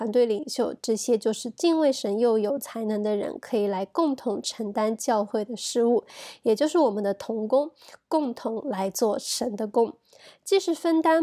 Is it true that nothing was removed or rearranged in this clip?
yes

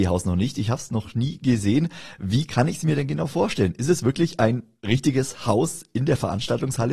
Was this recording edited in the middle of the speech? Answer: no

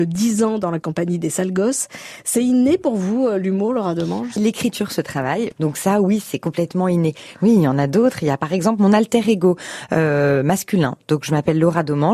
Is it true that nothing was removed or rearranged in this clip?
no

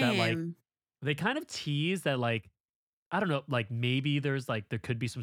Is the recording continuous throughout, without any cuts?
yes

